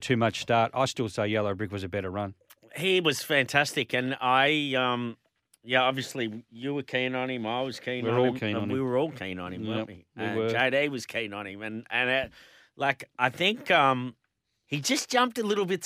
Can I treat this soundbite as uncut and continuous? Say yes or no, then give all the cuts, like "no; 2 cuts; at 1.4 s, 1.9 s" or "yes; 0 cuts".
yes; 0 cuts